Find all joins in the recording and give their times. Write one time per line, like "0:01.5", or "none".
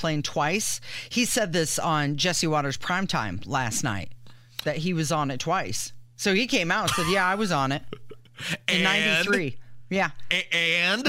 none